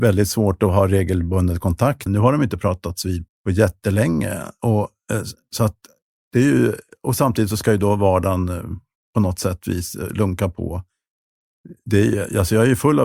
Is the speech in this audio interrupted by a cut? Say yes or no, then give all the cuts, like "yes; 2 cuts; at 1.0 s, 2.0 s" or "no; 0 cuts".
yes; 2 cuts; at 2.1 s, 3.3 s